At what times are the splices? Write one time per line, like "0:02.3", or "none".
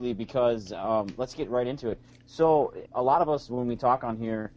0:02.9

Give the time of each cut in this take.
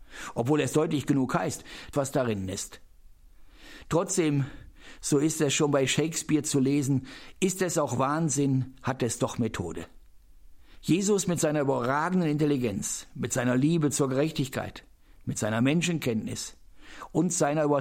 0:01.9

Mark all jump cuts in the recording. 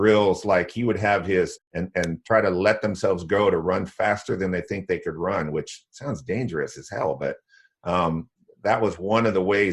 0:01.6

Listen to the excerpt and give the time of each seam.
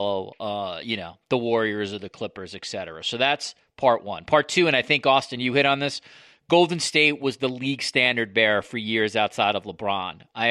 none

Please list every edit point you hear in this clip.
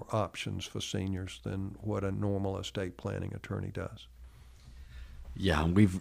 none

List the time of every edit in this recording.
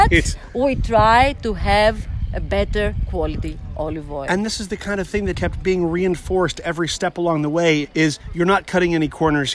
0:05.3
0:07.8

